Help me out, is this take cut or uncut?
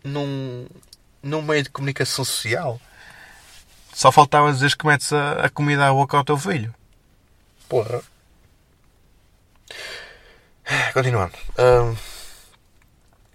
uncut